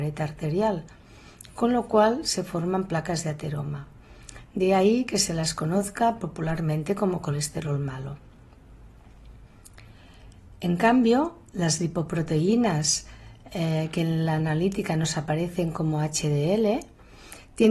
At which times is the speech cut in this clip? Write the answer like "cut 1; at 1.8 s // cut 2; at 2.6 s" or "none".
none